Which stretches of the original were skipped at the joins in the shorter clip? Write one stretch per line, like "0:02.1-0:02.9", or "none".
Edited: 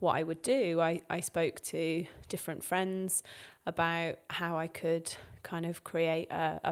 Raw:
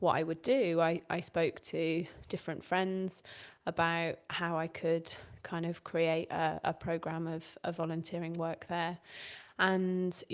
none

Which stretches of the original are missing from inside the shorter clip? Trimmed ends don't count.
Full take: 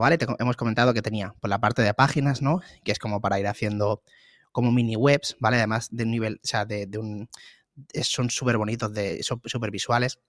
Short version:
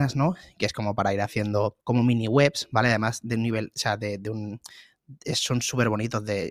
0:04.1-0:04.5

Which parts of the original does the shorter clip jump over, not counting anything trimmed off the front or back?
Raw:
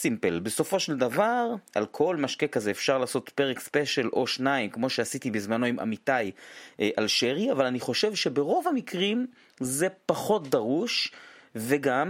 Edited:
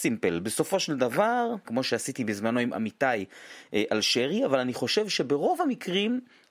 0:01.6-0:04.7

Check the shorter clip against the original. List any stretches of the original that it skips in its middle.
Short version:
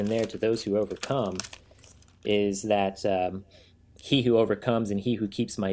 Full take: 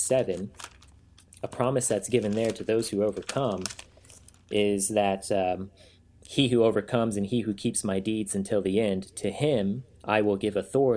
none

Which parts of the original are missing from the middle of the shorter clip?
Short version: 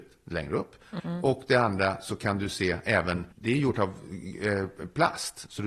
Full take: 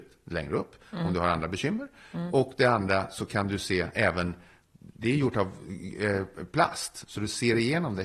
0:01.0-0:02.1
0:04.4-0:04.9

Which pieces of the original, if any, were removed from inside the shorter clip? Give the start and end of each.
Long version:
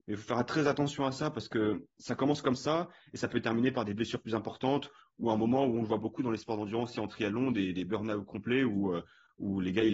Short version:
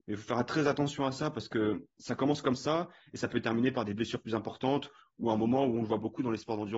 none

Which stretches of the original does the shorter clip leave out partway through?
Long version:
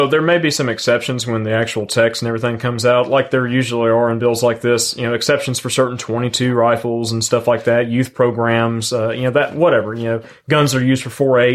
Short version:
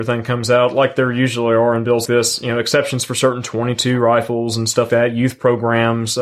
0:04.4-0:04.6
0:07.4-0:07.6

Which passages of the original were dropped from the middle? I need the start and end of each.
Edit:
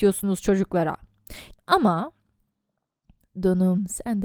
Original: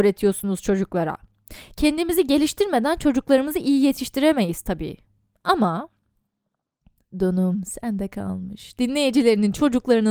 0:01.7-0:05.3

